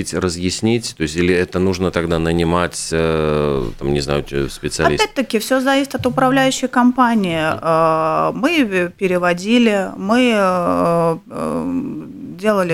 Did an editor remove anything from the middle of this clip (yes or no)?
no